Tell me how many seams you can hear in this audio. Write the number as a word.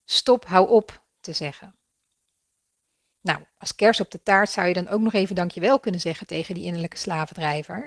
zero